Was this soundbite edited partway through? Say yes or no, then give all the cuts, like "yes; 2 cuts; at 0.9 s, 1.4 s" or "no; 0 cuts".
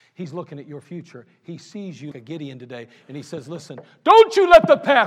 yes; 1 cut; at 2.1 s